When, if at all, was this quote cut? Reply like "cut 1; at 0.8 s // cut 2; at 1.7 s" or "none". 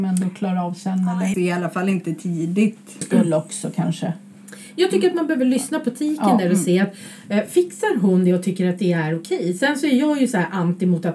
cut 1; at 1.3 s // cut 2; at 3.0 s